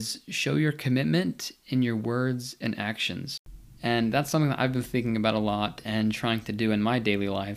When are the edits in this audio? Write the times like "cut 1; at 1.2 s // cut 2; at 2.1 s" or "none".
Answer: cut 1; at 3.8 s